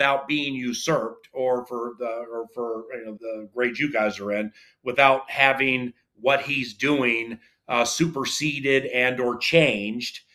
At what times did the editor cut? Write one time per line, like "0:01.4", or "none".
0:03.2